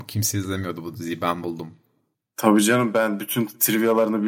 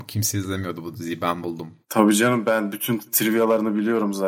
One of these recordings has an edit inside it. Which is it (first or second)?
second